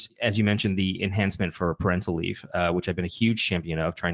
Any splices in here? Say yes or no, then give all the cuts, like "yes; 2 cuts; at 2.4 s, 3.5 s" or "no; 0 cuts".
no; 0 cuts